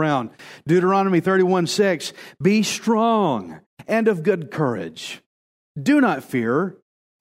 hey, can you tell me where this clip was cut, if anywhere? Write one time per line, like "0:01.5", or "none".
none

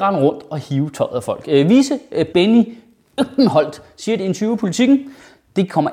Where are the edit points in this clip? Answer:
0:02.3

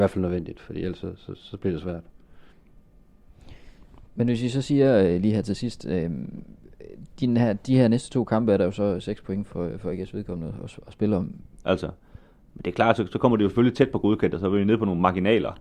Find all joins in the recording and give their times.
0:11.6

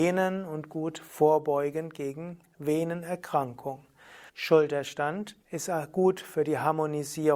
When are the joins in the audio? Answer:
0:04.3
0:05.4

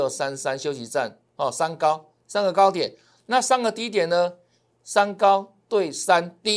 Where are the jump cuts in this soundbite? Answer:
0:04.7

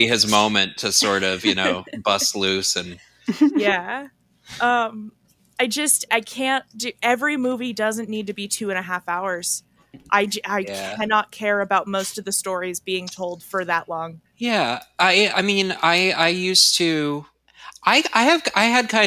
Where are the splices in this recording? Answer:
0:06.1

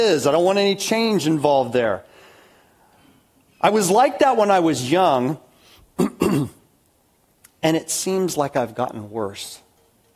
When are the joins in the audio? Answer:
none

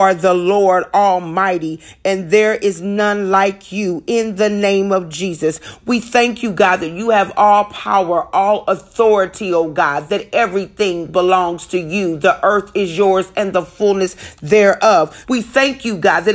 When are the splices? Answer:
0:15.2

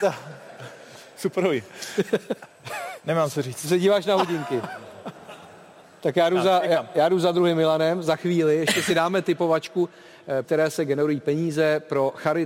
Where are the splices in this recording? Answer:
0:05.1
0:10.4

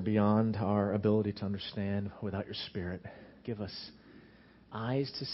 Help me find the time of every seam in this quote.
0:03.4

